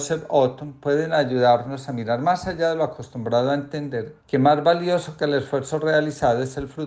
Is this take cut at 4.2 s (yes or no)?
yes